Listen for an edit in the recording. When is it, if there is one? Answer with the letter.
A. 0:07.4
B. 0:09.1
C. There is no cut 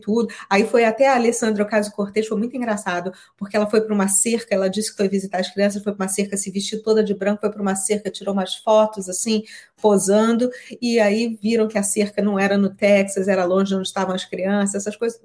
C